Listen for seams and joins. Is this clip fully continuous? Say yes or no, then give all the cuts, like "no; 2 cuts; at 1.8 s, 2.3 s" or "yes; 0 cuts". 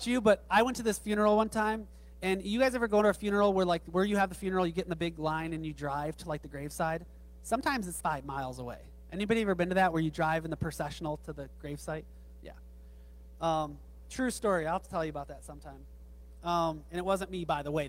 no; 2 cuts; at 8.0 s, 13.4 s